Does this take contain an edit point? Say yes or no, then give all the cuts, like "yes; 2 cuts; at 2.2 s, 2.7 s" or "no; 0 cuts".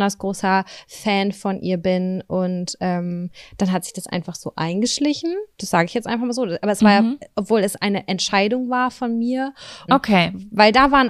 yes; 2 cuts; at 5.5 s, 9.9 s